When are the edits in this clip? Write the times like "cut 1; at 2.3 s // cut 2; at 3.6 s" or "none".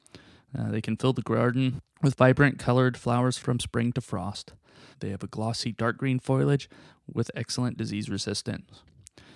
cut 1; at 4.9 s